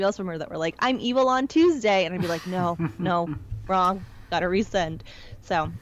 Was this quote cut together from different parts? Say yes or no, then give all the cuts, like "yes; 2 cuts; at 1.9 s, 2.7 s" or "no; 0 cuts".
no; 0 cuts